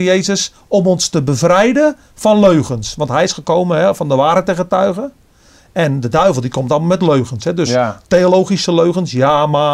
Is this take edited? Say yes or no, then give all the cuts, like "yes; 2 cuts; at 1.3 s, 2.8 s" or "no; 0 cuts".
no; 0 cuts